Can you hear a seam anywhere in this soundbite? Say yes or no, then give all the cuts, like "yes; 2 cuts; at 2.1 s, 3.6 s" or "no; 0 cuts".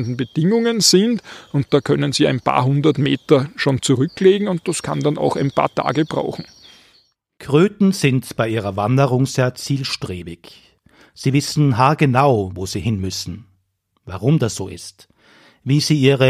no; 0 cuts